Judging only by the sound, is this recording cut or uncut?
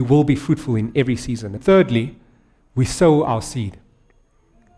cut